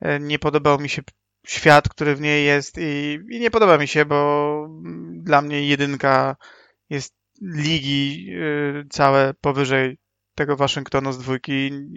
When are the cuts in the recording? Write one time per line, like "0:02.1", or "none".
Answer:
none